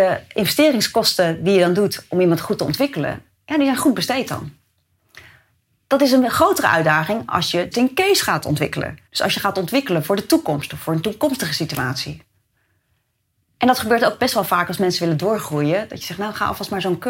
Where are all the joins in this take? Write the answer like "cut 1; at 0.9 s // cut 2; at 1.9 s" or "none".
cut 1; at 7.7 s // cut 2; at 9.1 s